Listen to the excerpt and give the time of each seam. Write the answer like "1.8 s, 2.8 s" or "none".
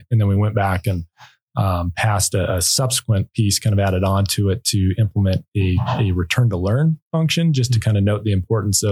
none